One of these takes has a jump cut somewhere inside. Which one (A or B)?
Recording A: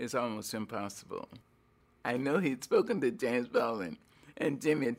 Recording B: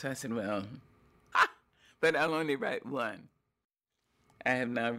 B